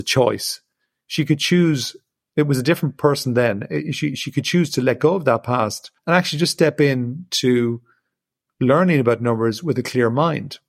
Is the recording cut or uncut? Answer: cut